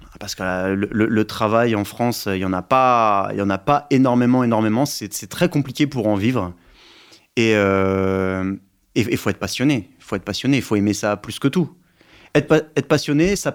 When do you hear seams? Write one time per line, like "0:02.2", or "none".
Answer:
none